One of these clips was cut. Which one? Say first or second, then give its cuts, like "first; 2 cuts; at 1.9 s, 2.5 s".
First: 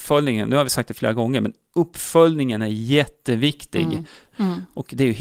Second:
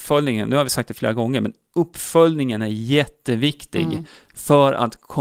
first; 1 cut; at 4.3 s